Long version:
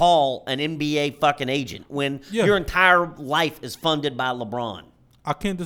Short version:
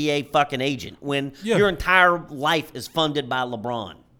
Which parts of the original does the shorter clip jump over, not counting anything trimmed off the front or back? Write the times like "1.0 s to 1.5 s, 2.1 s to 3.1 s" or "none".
none